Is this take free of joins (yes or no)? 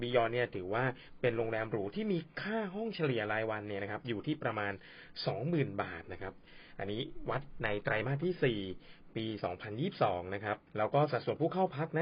no